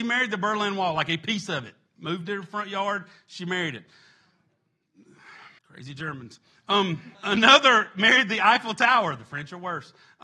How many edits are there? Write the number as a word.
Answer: two